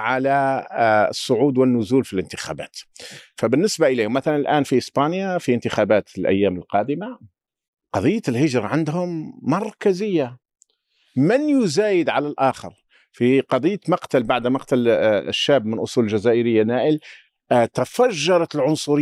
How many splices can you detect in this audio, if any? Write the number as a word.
zero